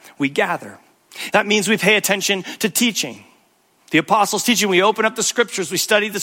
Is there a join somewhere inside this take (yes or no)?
yes